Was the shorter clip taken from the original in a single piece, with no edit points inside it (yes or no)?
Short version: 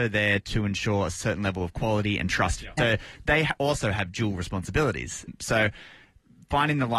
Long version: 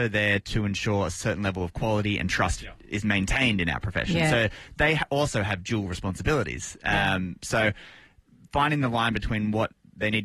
no